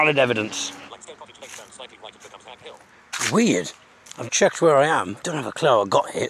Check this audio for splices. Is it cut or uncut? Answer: cut